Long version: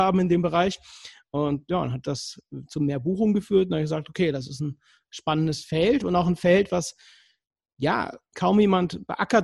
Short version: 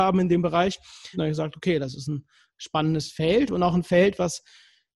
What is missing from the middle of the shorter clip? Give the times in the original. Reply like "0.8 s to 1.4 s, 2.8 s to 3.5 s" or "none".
1.1 s to 3.7 s